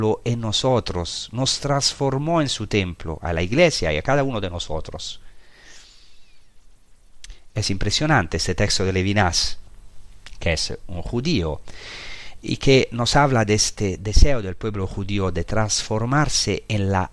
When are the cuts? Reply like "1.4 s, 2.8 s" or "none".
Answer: none